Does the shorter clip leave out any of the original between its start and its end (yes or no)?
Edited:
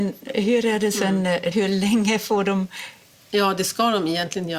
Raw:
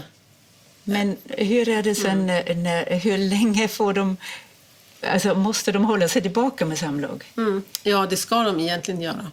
yes